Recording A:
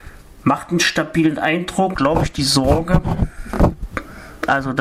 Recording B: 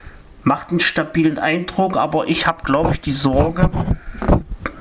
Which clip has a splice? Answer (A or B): A